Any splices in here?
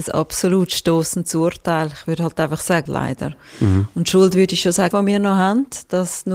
yes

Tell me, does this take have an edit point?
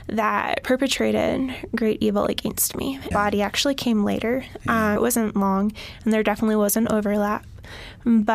yes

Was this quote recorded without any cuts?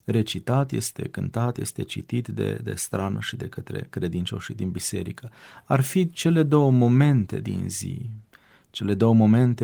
yes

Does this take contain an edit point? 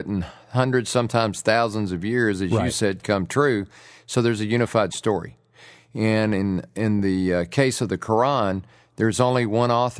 no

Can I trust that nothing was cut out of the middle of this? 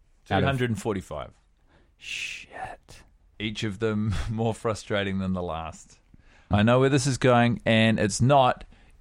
no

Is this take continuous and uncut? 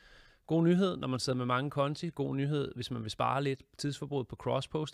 yes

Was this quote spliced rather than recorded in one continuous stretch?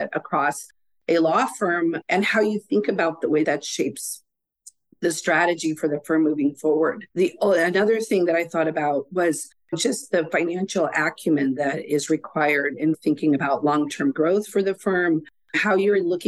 yes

